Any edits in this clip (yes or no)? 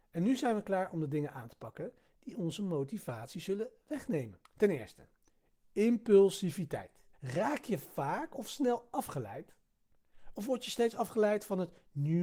yes